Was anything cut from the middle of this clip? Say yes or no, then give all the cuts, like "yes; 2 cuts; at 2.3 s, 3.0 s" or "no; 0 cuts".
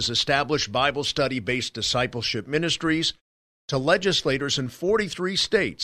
no; 0 cuts